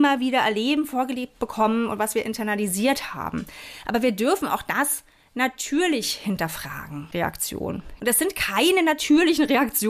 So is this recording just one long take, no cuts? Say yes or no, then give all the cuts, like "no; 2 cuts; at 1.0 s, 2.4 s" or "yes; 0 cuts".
no; 1 cut; at 7.1 s